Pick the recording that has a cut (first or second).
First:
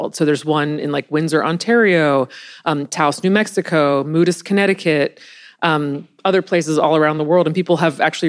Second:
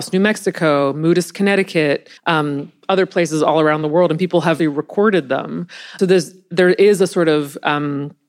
second